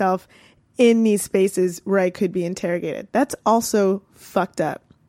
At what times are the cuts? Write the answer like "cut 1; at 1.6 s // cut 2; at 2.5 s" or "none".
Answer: none